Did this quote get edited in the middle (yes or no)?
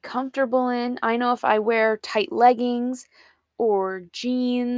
no